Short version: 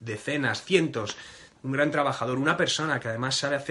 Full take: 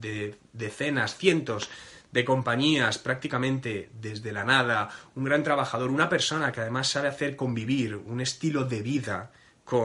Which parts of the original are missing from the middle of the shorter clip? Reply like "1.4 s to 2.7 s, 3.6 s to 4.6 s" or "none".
2.1 s to 5.1 s